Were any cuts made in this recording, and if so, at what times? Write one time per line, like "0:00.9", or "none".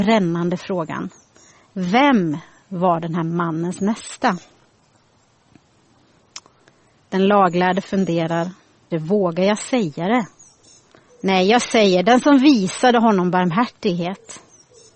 0:08.9
0:11.1